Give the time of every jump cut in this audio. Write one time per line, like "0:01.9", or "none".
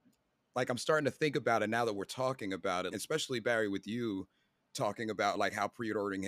0:02.9